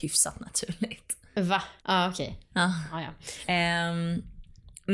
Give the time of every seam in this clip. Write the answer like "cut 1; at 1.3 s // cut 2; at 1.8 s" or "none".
cut 1; at 1.8 s // cut 2; at 3.5 s